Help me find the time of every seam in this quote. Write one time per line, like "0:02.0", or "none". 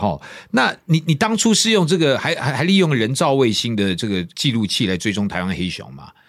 none